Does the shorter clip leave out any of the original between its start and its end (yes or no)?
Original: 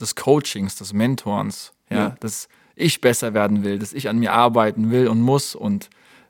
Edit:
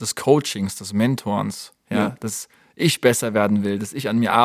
no